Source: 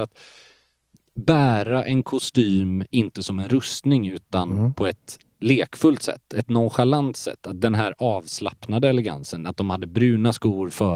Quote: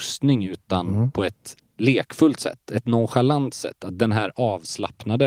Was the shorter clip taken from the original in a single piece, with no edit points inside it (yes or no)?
yes